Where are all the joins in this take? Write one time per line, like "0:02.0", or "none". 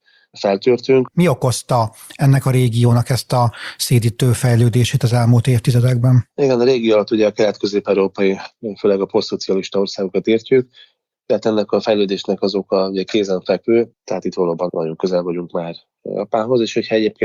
0:01.1
0:13.9